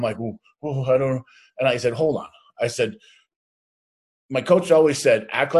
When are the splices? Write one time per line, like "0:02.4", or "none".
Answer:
none